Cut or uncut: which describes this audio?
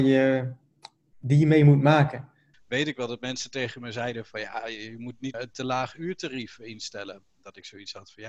cut